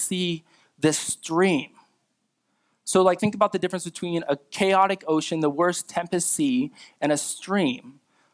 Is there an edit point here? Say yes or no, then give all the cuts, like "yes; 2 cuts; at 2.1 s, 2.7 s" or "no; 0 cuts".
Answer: no; 0 cuts